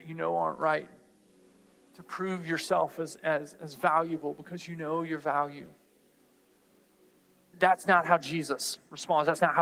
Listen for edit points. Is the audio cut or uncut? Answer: cut